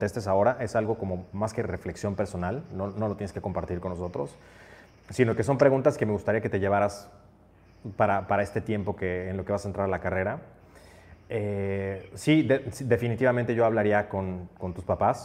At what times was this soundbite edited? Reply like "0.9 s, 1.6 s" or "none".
4.9 s